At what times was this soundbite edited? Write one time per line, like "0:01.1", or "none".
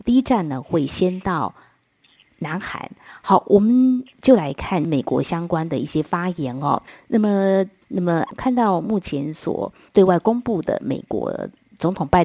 0:07.8